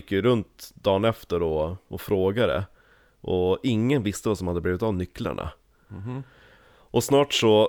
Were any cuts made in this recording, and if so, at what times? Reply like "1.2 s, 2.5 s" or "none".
none